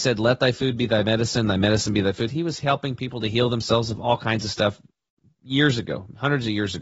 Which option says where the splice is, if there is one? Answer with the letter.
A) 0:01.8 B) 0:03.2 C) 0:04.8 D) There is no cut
D